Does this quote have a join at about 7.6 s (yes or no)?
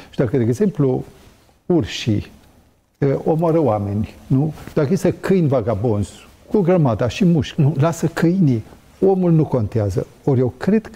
yes